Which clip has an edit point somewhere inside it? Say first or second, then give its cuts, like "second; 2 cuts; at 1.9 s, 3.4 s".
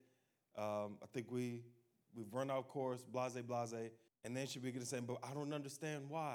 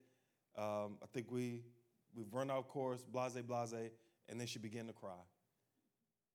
first; 1 cut; at 4.1 s